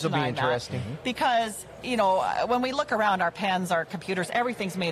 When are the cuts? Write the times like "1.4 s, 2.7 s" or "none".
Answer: 1.0 s